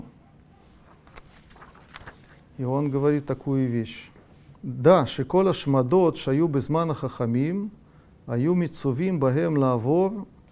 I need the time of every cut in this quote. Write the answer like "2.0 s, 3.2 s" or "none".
4.6 s